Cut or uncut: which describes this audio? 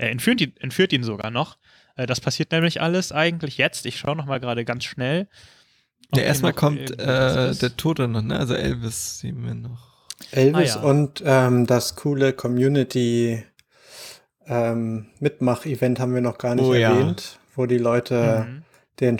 uncut